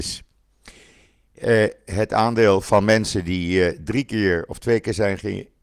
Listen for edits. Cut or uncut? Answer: uncut